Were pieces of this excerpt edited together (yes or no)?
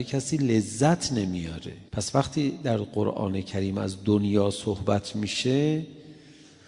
yes